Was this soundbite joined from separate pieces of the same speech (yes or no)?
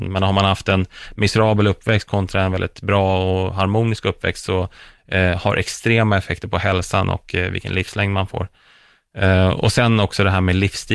no